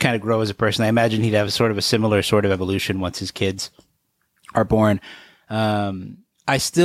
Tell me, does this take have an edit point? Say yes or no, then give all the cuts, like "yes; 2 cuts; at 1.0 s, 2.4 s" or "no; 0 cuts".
no; 0 cuts